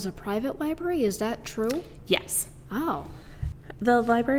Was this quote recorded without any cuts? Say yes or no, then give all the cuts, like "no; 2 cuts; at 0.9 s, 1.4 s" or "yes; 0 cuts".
yes; 0 cuts